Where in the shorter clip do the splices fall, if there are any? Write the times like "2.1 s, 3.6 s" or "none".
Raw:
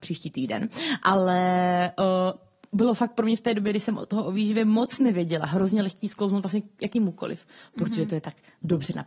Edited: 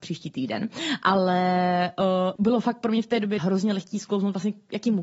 2.4 s, 3.4 s